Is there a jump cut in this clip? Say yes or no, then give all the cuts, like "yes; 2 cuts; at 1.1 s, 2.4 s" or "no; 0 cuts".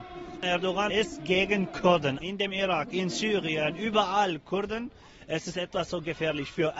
yes; 1 cut; at 2.2 s